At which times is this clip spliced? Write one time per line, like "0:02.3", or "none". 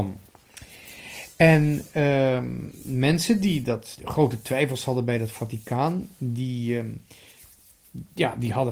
0:04.0

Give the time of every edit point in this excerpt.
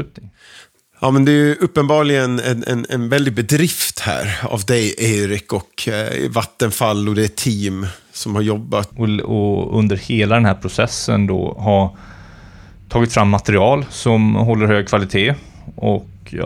0:08.9

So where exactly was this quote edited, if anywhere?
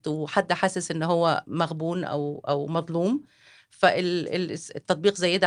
none

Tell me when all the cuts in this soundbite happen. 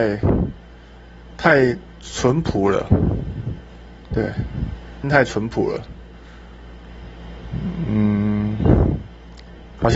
0:05.0

